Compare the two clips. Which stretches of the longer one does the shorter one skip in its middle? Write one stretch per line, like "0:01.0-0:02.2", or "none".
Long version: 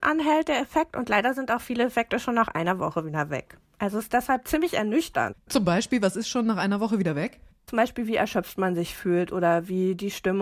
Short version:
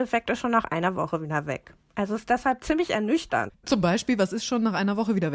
none